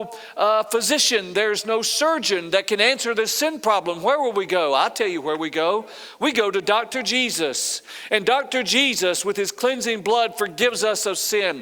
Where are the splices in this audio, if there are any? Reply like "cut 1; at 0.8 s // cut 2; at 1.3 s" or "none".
none